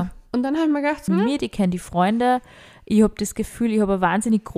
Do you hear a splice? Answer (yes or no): yes